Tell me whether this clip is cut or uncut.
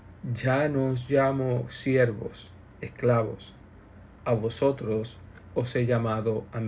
uncut